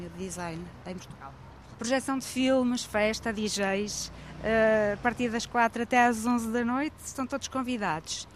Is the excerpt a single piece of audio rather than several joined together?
yes; 0 cuts

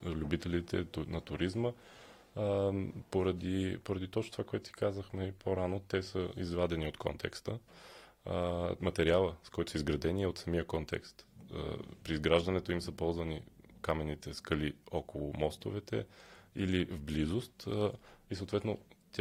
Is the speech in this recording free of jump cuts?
no; 1 cut; at 8.8 s

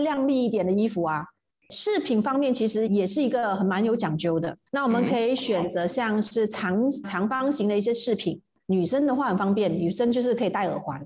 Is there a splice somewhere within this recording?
yes; 3 cuts; at 2.9 s, 4.7 s, 7.0 s

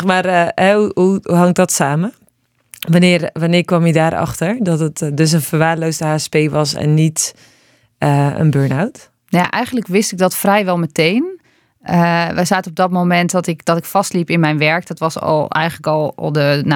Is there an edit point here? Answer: yes; 1 cut; at 9.2 s

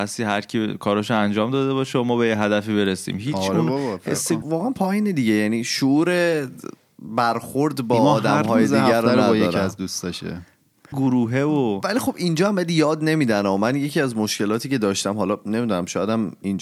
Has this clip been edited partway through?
yes; 2 cuts; at 4.4 s, 10.9 s

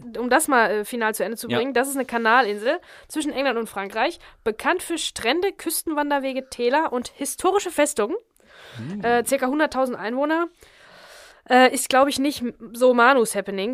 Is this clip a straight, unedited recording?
yes; 0 cuts

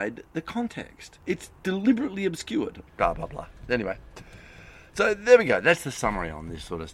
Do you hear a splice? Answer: yes; 1 cut; at 2.9 s

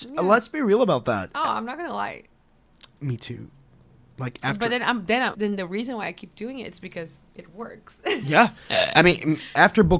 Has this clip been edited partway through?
yes; 1 cut; at 5.3 s

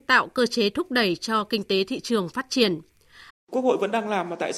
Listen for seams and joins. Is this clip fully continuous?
no; 1 cut; at 3.3 s

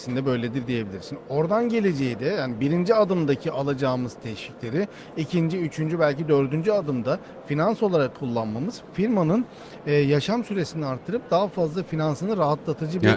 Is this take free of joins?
yes; 0 cuts

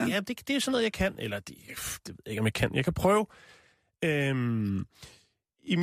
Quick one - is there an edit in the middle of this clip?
no; 0 cuts

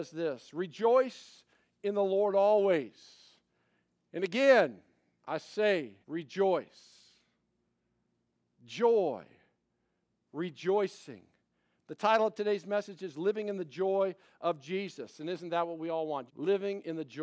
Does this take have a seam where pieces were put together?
yes; 2 cuts; at 6.0 s, 16.3 s

